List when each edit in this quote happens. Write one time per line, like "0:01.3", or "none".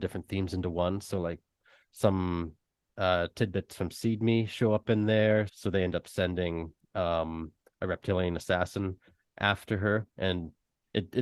0:05.5